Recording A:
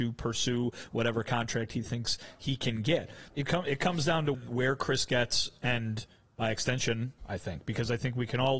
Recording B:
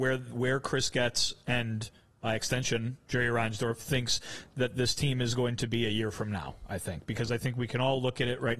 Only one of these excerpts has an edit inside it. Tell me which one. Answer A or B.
A